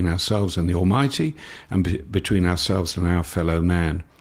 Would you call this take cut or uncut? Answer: uncut